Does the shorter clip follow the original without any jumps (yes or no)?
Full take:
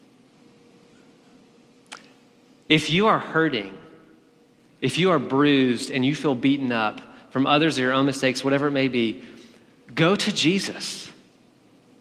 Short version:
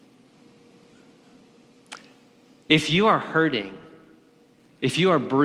yes